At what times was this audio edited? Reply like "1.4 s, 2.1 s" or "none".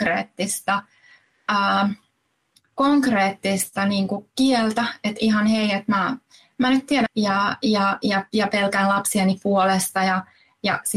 7.1 s

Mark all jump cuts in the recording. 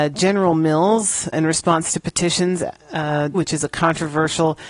1.3 s, 3.3 s

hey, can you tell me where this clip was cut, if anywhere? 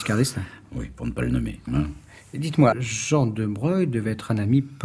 1.7 s, 2.7 s

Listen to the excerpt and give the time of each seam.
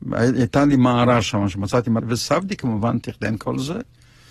2.0 s

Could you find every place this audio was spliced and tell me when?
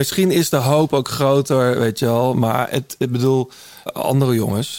3.9 s

